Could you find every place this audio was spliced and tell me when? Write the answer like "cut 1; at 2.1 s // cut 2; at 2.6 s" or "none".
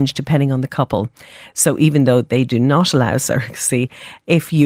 cut 1; at 1.5 s